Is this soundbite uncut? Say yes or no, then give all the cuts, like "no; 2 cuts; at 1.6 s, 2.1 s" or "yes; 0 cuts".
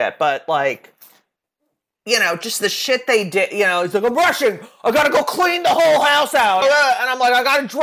no; 1 cut; at 6.6 s